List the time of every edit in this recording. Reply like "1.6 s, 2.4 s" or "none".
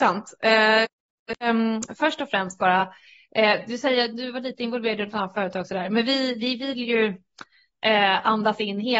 none